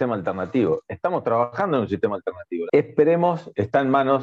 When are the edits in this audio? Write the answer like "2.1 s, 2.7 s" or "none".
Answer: 2.7 s